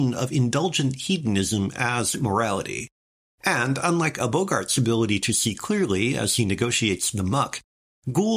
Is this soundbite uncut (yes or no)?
yes